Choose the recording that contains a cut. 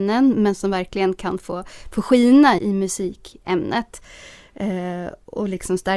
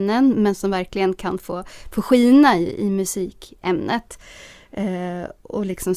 first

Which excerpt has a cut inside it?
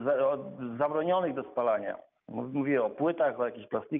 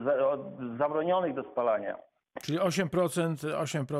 second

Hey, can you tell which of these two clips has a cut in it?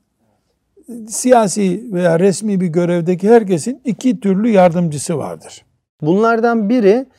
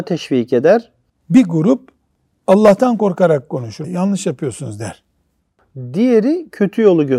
second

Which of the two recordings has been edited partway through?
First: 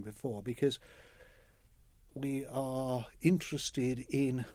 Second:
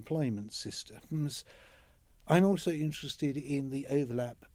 first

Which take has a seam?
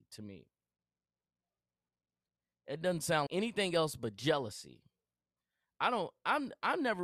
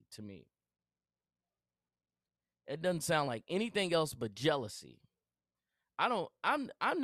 first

